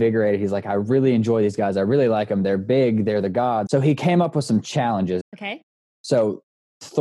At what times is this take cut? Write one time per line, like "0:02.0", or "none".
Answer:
0:03.7
0:05.2